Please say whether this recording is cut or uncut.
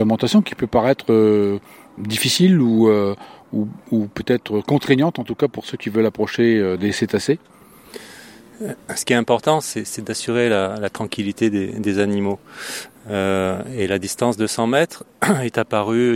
uncut